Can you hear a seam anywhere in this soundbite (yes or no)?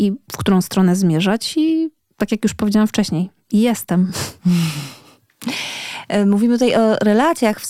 no